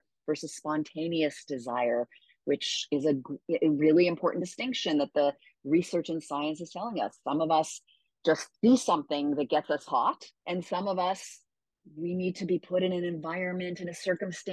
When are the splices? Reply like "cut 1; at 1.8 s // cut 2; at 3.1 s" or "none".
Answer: cut 1; at 8.6 s // cut 2; at 10.4 s